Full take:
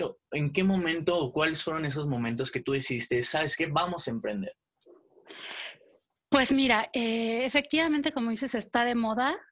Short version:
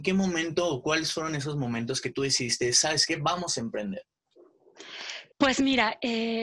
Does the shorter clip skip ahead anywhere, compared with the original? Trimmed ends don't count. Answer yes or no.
yes